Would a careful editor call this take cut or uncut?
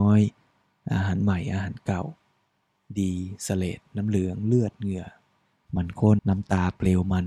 cut